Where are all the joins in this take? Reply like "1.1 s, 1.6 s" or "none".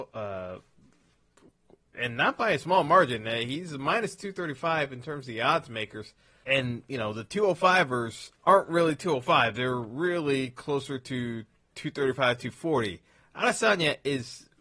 6.4 s, 8.4 s